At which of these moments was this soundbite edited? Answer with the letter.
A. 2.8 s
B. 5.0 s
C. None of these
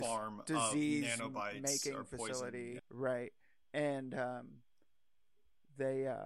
A